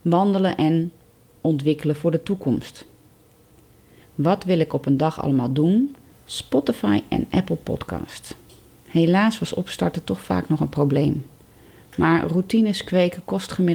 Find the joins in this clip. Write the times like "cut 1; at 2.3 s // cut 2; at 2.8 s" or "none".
cut 1; at 4.0 s // cut 2; at 6.1 s

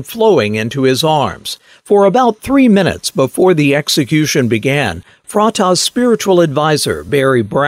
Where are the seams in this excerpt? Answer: none

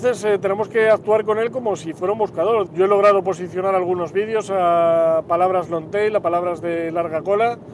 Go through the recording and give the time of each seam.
cut 1; at 2.7 s

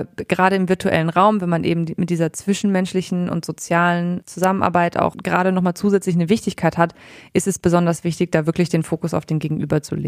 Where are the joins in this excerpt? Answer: none

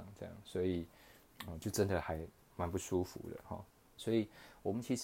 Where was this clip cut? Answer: cut 1; at 4.0 s

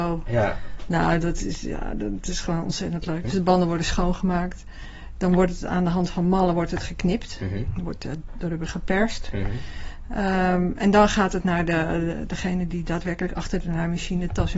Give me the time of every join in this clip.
cut 1; at 3.2 s

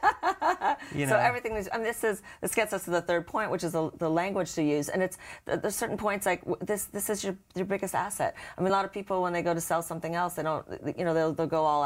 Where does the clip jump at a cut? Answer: none

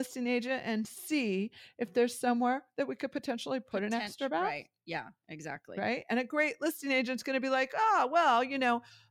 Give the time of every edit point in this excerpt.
none

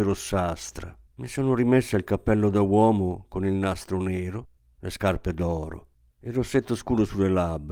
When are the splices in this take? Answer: cut 1; at 1.1 s

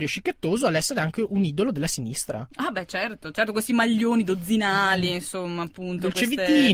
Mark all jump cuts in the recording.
none

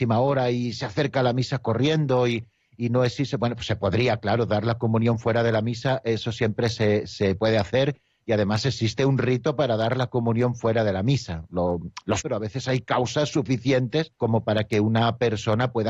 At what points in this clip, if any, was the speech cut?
cut 1; at 12.2 s // cut 2; at 14.2 s

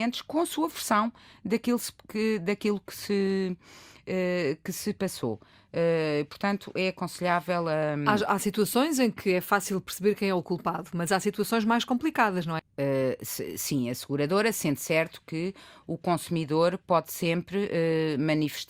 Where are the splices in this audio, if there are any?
cut 1; at 12.6 s

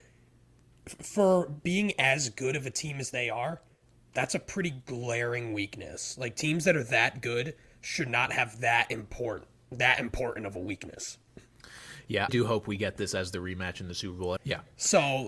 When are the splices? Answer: cut 1; at 12.3 s // cut 2; at 14.4 s

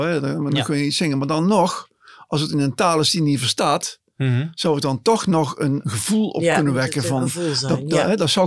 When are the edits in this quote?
none

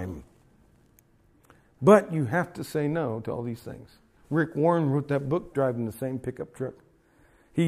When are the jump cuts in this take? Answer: cut 1; at 4.2 s // cut 2; at 5.5 s

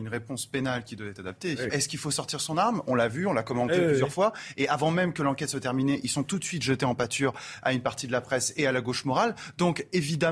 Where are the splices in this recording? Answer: cut 1; at 1.7 s

